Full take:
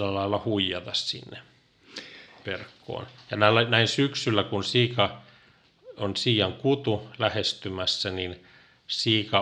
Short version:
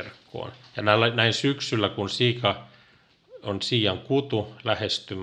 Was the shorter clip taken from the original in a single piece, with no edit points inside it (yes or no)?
yes